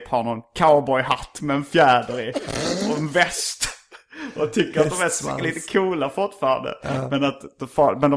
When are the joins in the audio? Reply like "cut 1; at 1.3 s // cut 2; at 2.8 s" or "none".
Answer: none